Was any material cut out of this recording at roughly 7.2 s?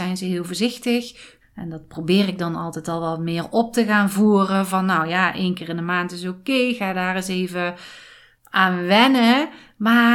no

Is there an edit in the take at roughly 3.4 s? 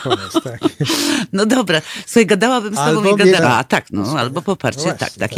yes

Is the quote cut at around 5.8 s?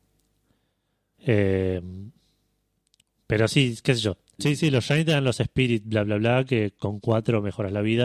no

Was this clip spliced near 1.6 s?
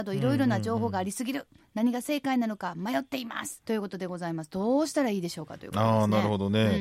no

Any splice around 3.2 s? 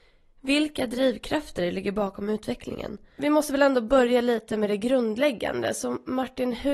yes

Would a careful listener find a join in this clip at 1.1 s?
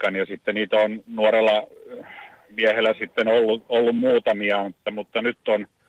yes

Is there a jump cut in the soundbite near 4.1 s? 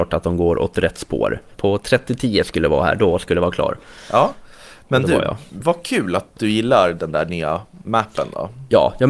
no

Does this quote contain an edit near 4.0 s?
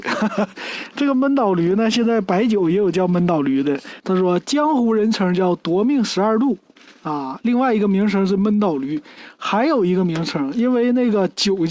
yes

